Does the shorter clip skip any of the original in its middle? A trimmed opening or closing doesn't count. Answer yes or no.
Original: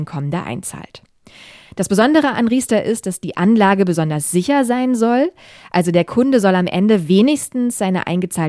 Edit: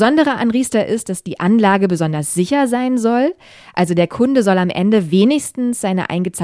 no